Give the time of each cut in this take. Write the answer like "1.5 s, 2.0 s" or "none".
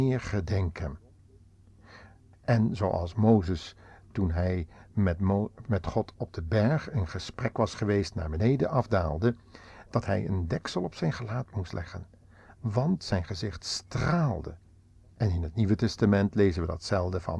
2.3 s